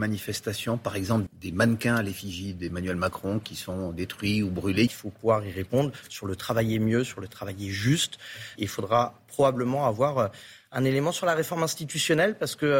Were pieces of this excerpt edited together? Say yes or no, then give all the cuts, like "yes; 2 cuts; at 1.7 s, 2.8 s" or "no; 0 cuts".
yes; 3 cuts; at 1.3 s, 4.9 s, 8.6 s